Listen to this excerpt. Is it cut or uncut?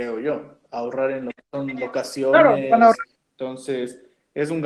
cut